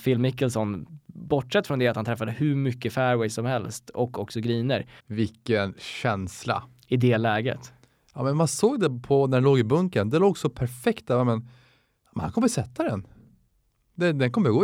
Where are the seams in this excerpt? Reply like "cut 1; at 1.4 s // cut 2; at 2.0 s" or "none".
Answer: cut 1; at 5.0 s